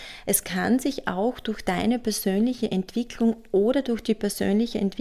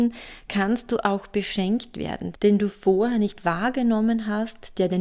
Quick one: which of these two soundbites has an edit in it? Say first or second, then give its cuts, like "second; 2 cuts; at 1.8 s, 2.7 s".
second; 1 cut; at 2.3 s